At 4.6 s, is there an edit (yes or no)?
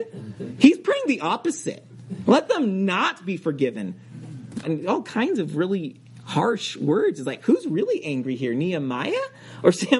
yes